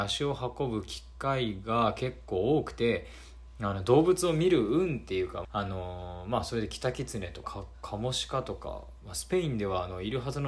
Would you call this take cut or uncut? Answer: cut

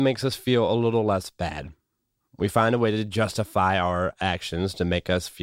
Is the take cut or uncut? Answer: uncut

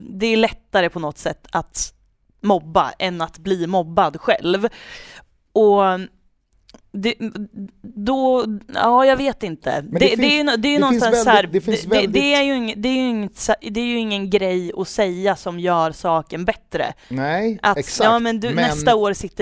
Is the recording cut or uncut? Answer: uncut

